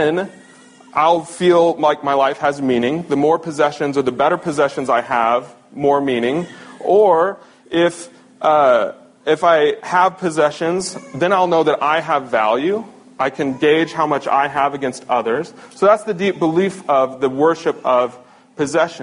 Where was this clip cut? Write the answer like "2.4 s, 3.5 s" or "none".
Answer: none